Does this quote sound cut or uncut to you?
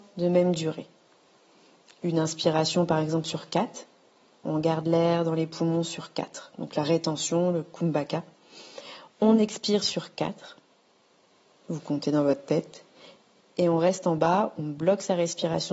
uncut